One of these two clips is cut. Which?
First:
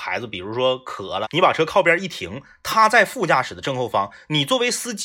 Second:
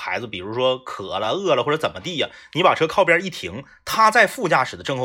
first; 1 cut; at 1.2 s

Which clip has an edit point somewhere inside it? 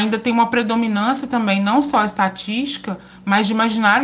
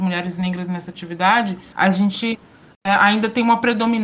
second; 1 cut; at 1.7 s

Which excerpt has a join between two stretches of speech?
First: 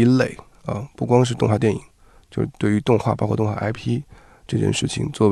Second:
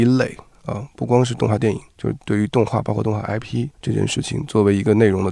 second; 2 cuts; at 1.9 s, 3.7 s

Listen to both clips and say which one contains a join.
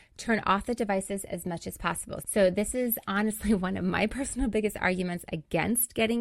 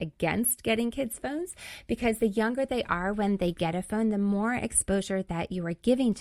first; 1 cut; at 2.2 s

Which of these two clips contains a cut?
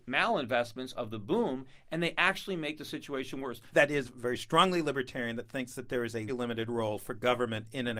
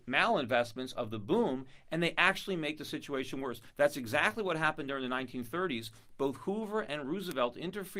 first; 2 cuts; at 3.7 s, 6.3 s

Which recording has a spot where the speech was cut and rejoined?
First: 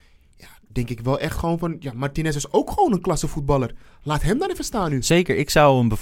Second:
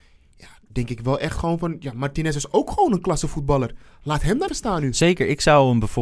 second; 1 cut; at 4.5 s

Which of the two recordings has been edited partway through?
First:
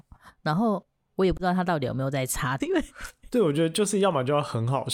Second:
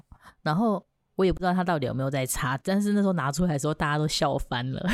first; 1 cut; at 2.6 s

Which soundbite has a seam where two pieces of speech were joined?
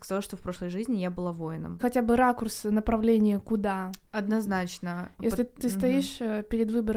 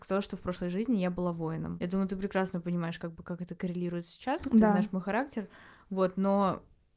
first; 1 cut; at 1.8 s

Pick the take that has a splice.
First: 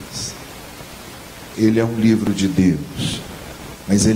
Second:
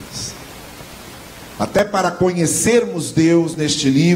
first; 1 cut; at 1.5 s

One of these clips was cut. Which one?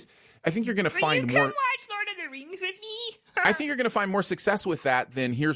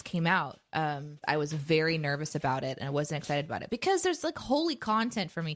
second; 1 cut; at 1.2 s

